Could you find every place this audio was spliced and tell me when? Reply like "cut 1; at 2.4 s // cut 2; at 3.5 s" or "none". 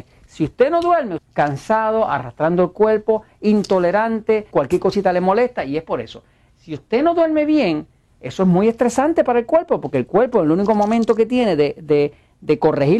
cut 1; at 1.2 s // cut 2; at 4.5 s // cut 3; at 6.5 s